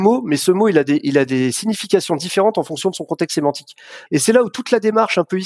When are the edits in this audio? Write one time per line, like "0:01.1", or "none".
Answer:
0:04.1